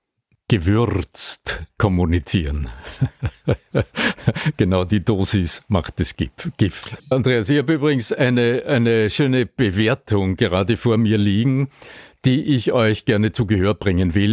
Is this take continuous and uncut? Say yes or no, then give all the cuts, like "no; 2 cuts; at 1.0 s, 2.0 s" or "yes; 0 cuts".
no; 1 cut; at 7.0 s